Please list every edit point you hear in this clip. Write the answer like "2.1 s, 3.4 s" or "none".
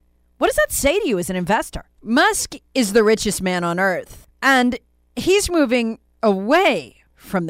2.0 s